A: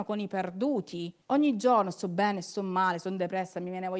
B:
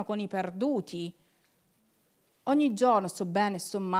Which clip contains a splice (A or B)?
A